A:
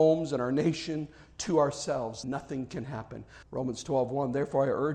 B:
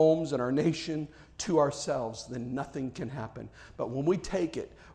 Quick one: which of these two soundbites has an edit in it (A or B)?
A